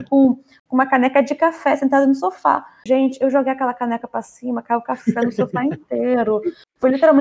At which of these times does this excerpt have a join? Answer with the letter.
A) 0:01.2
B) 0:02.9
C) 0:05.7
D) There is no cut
B